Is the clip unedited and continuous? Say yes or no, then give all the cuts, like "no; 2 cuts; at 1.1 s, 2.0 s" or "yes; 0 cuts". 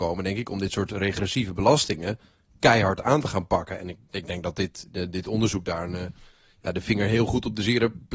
yes; 0 cuts